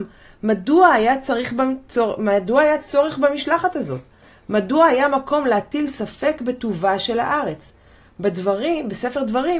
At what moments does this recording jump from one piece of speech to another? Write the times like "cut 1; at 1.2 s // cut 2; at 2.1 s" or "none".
none